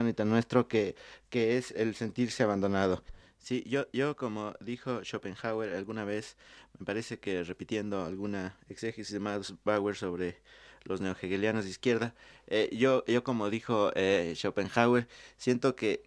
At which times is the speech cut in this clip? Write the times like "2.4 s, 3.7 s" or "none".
1.7 s